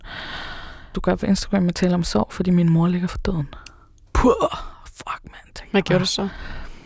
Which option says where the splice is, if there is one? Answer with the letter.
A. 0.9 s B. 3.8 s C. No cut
A